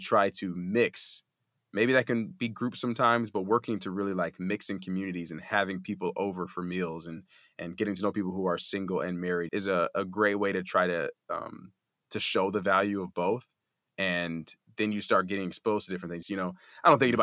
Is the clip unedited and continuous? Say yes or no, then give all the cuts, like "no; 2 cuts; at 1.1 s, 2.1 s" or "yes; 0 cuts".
no; 2 cuts; at 9.5 s, 16.2 s